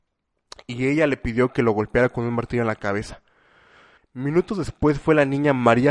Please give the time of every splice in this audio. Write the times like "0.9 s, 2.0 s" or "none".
4.0 s